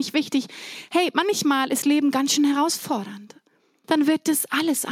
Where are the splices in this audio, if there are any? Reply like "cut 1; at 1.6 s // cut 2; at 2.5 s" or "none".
cut 1; at 3.8 s